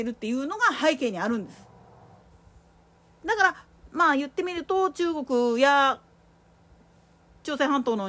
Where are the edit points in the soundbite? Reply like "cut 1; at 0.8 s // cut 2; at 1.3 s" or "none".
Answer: none